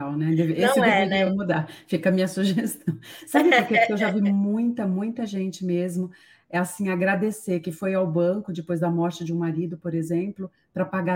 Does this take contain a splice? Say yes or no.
no